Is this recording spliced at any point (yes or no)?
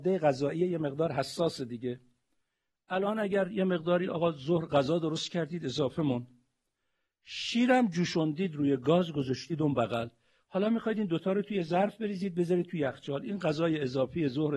no